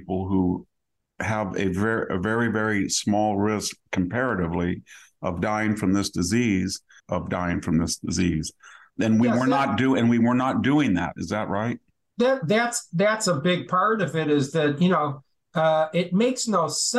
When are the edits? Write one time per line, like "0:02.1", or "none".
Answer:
0:07.0
0:08.9